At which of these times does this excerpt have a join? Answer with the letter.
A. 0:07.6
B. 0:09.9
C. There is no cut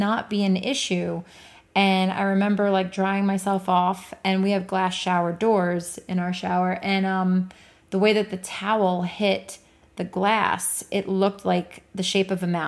C